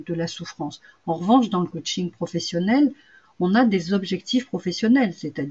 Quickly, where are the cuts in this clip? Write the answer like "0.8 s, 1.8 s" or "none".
none